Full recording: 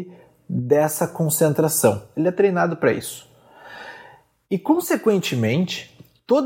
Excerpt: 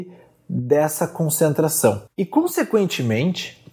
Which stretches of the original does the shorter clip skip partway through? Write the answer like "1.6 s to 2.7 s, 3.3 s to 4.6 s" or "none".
2.1 s to 4.4 s

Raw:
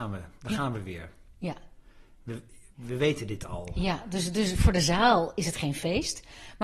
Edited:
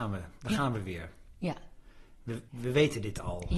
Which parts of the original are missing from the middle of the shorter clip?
2.5 s to 2.7 s

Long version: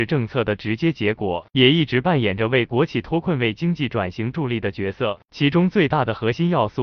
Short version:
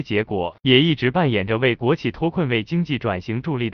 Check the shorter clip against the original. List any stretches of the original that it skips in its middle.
none

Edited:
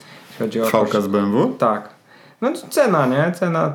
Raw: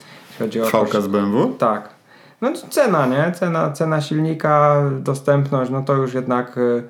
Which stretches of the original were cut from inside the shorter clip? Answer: none

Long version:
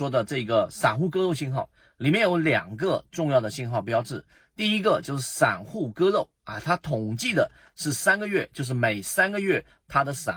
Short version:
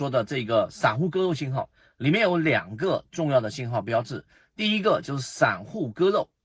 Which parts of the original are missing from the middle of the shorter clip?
none

